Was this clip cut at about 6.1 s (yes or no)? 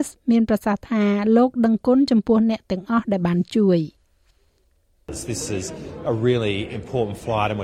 yes